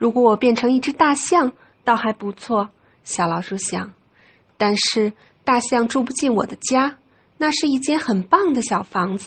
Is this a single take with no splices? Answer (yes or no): yes